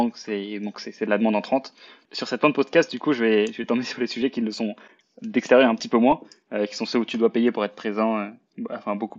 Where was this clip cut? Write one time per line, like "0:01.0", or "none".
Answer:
0:02.0